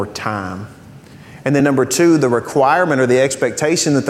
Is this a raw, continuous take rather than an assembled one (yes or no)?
yes